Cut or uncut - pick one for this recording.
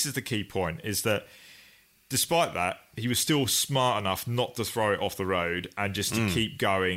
uncut